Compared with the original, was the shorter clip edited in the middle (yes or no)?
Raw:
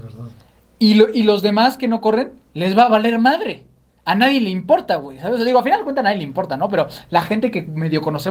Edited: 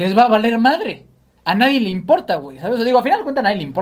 no